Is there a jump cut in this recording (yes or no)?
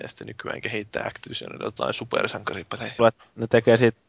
yes